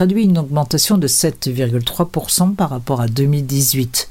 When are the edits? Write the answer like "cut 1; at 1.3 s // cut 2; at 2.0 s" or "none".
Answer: none